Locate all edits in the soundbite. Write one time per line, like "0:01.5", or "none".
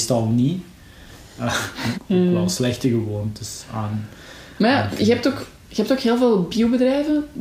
0:01.9